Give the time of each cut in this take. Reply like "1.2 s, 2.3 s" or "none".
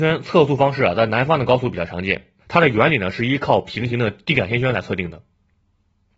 2.4 s